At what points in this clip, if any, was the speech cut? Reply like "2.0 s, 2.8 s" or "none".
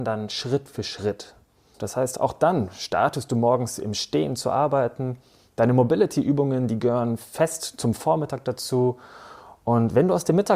1.7 s